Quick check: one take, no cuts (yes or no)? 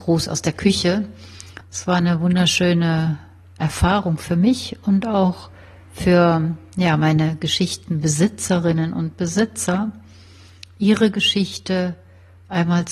no